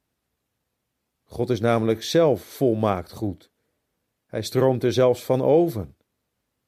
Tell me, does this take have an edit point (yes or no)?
no